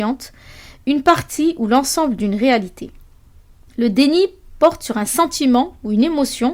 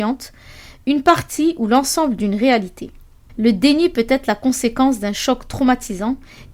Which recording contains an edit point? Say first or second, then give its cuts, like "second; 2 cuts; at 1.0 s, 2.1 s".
second; 1 cut; at 3.3 s